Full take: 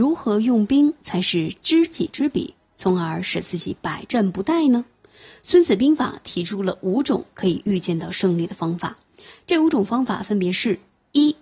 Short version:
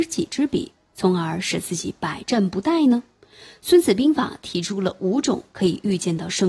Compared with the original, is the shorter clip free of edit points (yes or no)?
yes